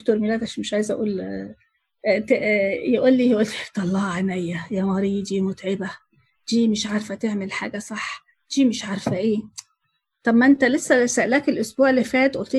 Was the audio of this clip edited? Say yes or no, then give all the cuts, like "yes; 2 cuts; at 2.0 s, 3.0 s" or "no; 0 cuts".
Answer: no; 0 cuts